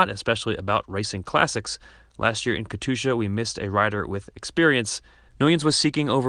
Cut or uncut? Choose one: cut